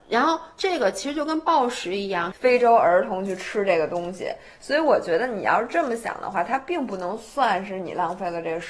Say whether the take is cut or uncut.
cut